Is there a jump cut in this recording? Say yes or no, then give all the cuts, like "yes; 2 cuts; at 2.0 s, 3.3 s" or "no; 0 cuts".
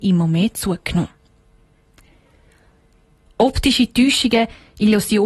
no; 0 cuts